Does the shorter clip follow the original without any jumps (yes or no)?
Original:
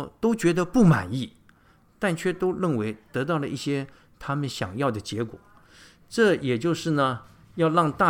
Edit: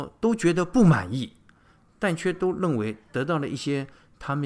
yes